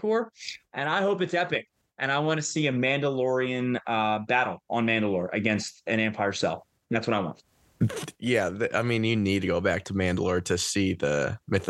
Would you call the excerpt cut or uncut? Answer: uncut